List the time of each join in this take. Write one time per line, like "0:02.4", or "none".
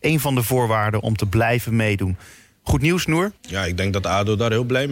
0:03.4